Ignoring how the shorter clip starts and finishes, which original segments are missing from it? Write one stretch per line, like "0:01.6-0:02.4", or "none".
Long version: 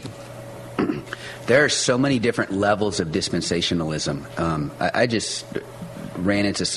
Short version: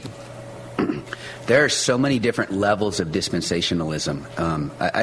none